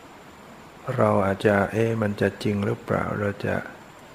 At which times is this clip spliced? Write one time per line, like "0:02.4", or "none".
0:01.4